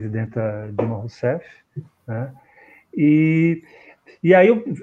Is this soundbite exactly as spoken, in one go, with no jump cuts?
yes; 0 cuts

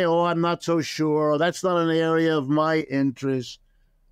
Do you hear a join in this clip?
no; 0 cuts

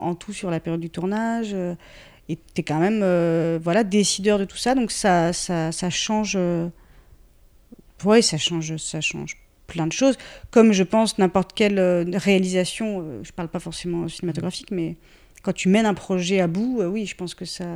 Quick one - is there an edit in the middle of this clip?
yes; 1 cut; at 7.9 s

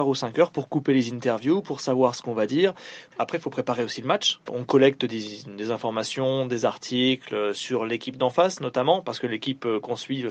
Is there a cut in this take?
yes; 1 cut; at 4.5 s

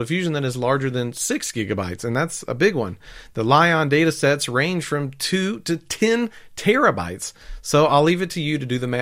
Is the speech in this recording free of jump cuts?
yes; 0 cuts

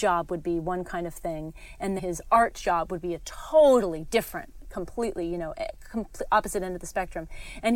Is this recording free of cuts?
no; 1 cut; at 2.0 s

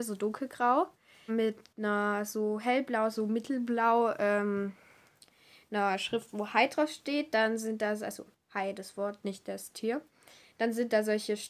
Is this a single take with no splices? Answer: no; 1 cut; at 1.3 s

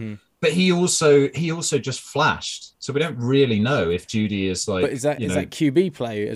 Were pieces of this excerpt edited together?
no; 0 cuts

